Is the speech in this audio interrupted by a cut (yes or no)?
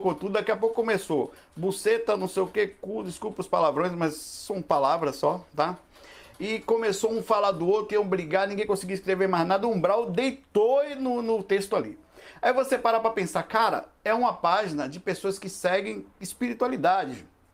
yes